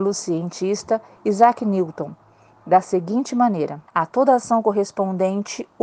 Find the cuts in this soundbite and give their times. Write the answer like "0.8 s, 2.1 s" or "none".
3.9 s